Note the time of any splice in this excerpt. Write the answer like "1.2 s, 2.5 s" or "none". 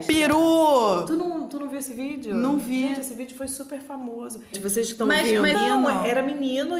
4.5 s, 5.5 s